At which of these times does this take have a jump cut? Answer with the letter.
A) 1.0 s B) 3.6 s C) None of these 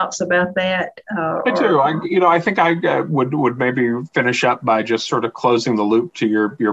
C